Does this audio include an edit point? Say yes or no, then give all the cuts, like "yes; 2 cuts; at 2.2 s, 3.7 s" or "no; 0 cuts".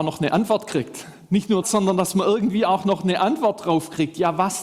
yes; 1 cut; at 1.6 s